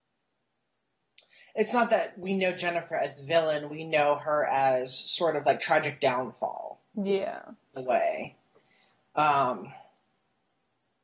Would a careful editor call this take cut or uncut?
uncut